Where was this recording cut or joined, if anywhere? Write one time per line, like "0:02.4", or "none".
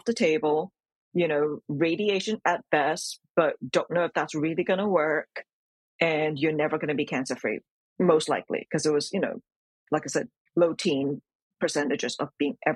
none